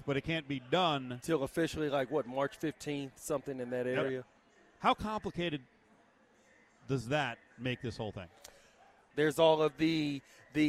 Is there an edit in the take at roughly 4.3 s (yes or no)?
no